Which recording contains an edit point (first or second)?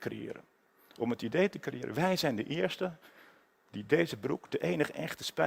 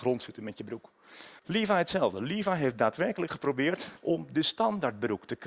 second